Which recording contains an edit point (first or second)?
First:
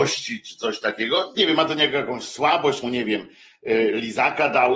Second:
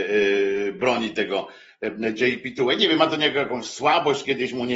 first